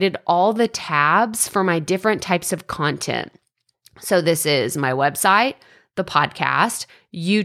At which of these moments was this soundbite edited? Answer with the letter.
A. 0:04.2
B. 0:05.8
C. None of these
C